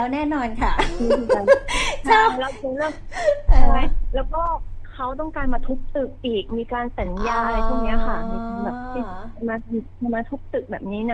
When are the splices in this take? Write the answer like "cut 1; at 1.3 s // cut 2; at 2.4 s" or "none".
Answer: none

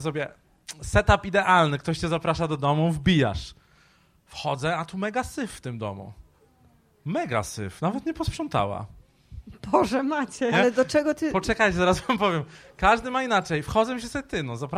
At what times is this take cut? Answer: cut 1; at 10.5 s

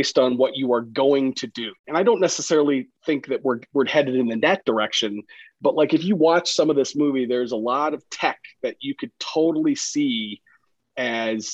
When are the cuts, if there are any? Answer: cut 1; at 1.8 s

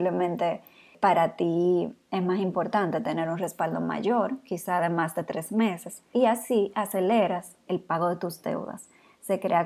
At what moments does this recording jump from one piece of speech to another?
cut 1; at 6.1 s // cut 2; at 7.7 s

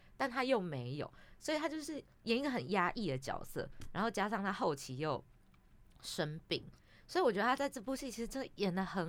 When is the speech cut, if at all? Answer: none

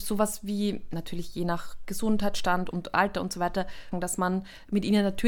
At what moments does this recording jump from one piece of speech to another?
cut 1; at 2.7 s // cut 2; at 3.9 s

